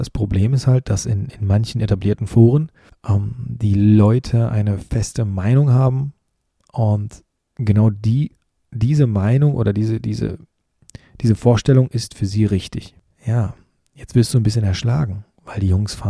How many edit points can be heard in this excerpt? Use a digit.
0